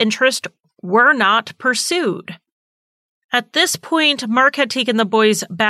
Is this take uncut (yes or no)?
yes